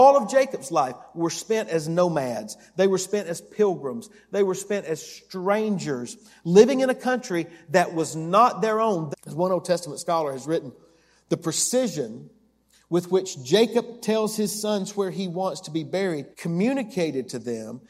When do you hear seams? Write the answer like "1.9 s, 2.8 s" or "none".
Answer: 9.1 s, 16.3 s

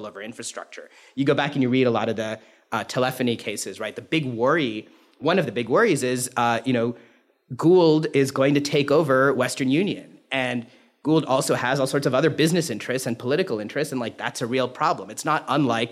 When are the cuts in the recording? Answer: none

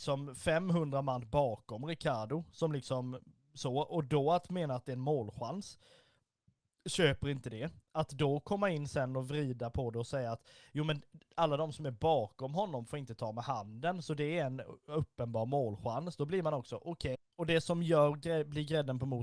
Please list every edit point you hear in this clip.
17.1 s

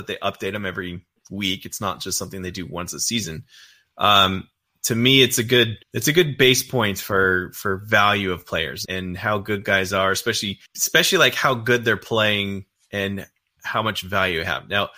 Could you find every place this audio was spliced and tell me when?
5.8 s, 8.8 s, 10.7 s

